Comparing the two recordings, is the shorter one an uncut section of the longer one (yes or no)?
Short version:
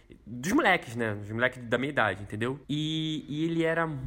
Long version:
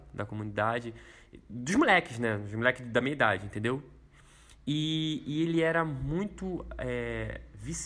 no